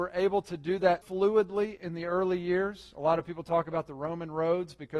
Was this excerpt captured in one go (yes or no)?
no